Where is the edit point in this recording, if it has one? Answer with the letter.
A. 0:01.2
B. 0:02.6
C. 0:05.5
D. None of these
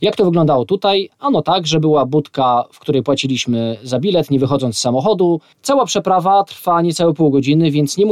C